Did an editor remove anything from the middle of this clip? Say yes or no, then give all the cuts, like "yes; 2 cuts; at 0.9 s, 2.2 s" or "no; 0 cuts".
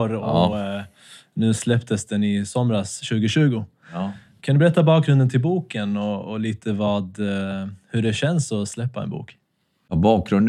no; 0 cuts